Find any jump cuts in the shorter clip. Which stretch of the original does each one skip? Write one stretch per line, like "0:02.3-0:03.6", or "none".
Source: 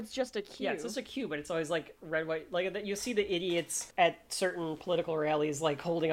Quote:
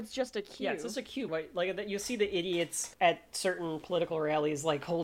0:01.3-0:02.3